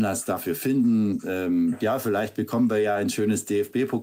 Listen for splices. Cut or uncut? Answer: uncut